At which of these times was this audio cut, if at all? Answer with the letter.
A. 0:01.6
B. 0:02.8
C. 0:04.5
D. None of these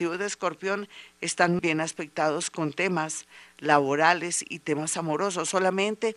A